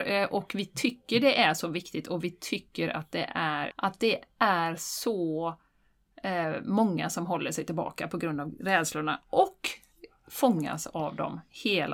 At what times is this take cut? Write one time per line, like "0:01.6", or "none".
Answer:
0:03.7